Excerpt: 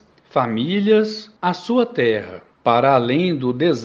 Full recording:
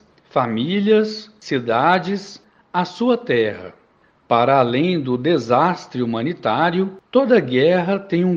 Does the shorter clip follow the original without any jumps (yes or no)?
no